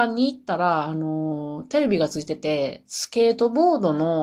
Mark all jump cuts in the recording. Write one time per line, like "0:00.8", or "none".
none